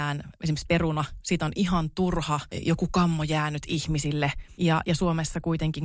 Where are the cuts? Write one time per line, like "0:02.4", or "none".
0:04.6